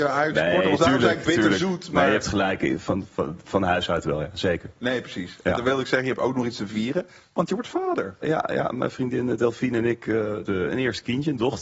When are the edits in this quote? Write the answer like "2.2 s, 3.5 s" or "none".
8.2 s, 10.5 s